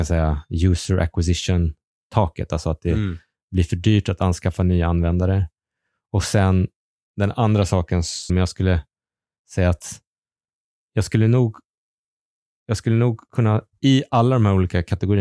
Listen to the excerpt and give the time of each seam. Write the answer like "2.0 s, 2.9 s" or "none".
8.3 s

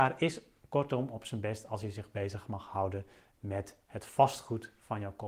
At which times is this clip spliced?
none

